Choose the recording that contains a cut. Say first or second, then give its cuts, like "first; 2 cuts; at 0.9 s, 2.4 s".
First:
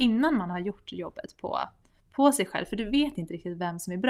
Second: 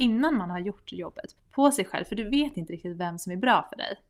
second; 1 cut; at 1.4 s